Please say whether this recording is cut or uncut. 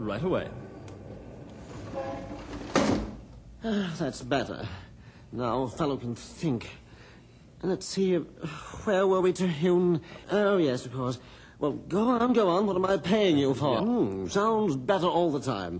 cut